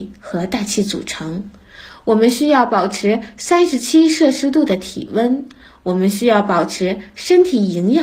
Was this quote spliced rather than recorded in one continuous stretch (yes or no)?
no